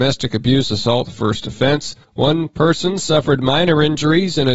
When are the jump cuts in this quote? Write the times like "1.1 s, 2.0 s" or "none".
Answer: 2.0 s